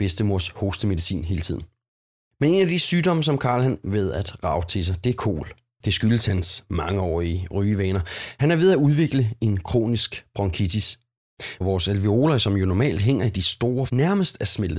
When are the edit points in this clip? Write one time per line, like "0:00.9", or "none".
0:03.8
0:11.6
0:13.9